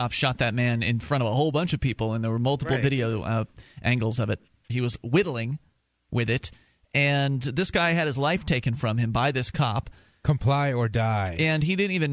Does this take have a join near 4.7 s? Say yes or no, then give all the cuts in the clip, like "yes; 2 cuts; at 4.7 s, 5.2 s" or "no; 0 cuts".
yes; 1 cut; at 4.7 s